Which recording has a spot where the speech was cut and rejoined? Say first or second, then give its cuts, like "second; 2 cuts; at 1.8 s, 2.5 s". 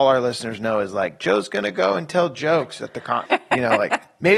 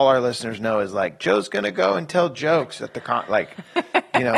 first; 1 cut; at 3.3 s